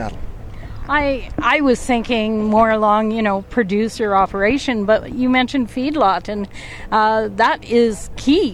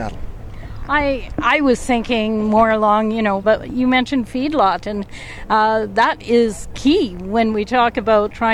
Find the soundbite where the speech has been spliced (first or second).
second